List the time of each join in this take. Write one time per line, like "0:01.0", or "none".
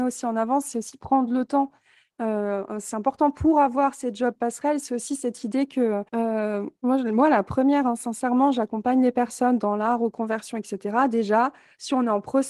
0:06.1